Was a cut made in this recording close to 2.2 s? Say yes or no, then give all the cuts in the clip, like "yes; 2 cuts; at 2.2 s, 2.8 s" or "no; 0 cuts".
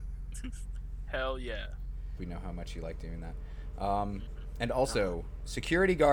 yes; 1 cut; at 2.2 s